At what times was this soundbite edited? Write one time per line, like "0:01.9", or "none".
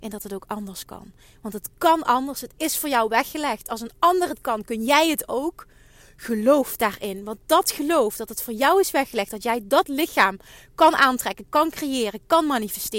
none